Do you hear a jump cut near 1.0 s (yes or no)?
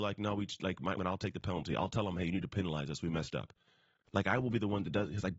yes